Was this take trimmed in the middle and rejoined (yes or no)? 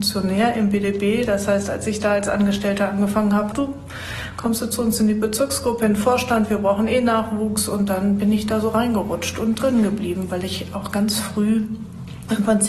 yes